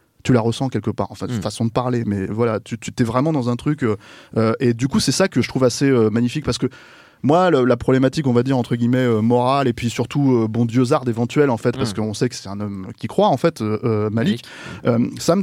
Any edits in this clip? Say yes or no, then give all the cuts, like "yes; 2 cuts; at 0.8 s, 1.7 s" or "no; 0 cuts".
no; 0 cuts